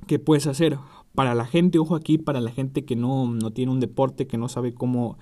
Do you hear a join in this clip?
no; 0 cuts

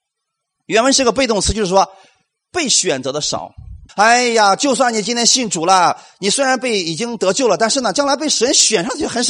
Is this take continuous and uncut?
no; 1 cut; at 3.9 s

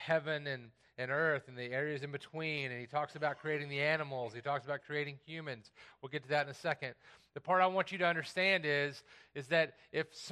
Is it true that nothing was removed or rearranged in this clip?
yes; 0 cuts

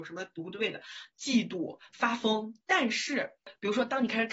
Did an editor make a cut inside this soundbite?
yes; 2 cuts; at 1.1 s, 2.6 s

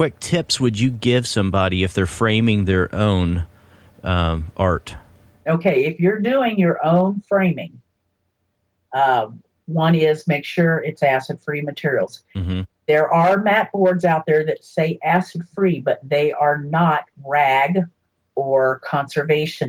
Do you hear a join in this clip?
no; 0 cuts

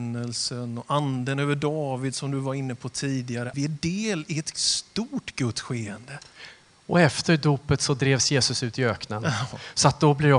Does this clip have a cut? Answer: yes; 1 cut; at 3.5 s

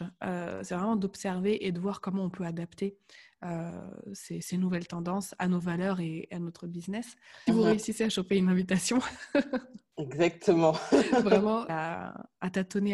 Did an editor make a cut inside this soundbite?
yes; 2 cuts; at 7.5 s, 11.7 s

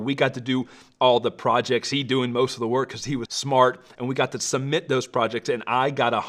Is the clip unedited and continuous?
no; 1 cut; at 3.3 s

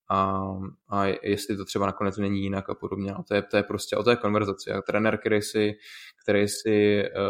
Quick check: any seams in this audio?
no; 0 cuts

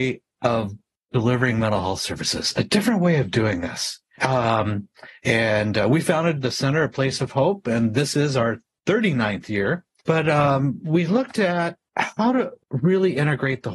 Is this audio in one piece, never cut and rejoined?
yes; 0 cuts

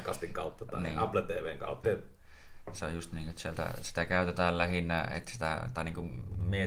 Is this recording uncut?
no; 1 cut; at 1.8 s

